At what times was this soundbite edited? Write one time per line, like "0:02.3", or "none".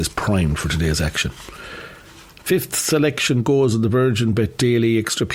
none